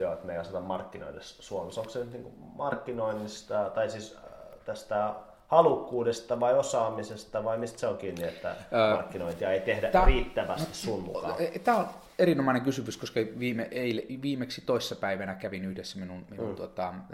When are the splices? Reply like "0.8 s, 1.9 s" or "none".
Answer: none